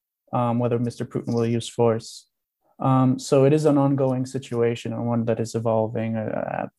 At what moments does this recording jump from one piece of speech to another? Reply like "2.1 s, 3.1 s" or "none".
none